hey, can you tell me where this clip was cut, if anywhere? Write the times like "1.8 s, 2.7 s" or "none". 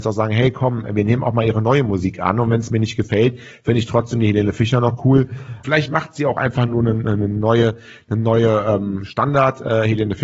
5.6 s